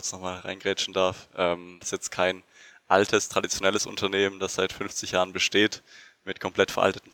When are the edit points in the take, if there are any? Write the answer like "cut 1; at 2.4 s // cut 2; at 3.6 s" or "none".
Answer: cut 1; at 1.8 s